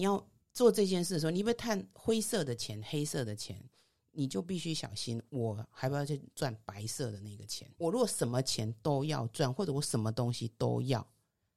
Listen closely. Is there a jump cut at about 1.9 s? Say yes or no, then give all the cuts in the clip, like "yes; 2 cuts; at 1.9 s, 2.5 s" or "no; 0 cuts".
yes; 2 cuts; at 1.9 s, 7.8 s